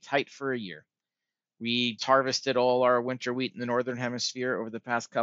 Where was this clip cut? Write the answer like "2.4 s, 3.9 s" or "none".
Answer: 2.0 s